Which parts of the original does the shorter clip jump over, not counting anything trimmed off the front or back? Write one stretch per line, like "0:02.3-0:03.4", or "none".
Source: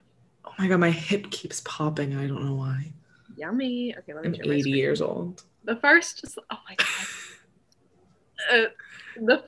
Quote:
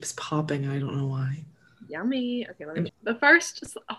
0:04.4-0:05.5